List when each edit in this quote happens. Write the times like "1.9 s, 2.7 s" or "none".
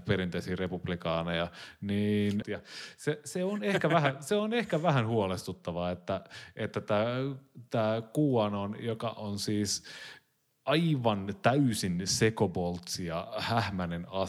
2.4 s